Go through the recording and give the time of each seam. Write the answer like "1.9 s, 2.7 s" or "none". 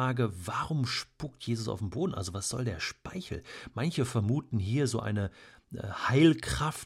none